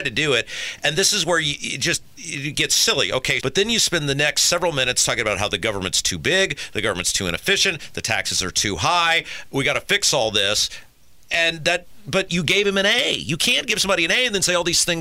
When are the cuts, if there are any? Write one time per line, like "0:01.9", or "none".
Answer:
0:03.4